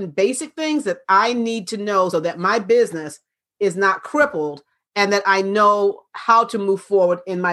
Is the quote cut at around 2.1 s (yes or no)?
yes